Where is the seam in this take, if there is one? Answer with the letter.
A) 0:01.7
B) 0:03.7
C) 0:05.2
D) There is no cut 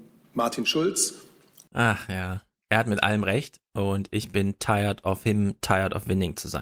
A